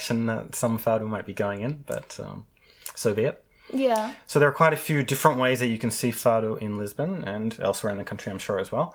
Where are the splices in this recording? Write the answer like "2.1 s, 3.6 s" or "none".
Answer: none